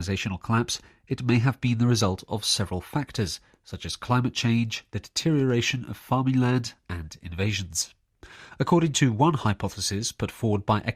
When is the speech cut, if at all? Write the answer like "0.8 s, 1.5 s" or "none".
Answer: none